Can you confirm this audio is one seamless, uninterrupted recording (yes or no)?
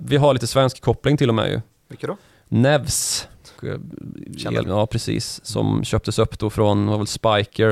no